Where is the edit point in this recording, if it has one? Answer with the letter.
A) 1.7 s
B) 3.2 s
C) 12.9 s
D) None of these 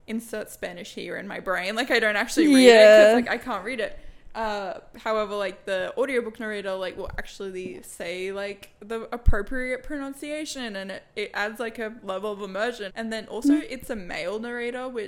C